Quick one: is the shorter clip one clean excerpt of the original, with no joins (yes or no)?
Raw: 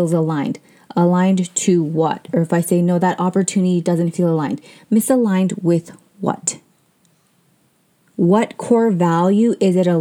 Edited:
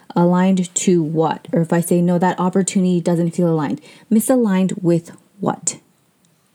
yes